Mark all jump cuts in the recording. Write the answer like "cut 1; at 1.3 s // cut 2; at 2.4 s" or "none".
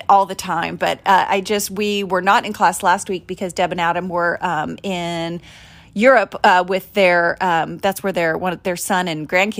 none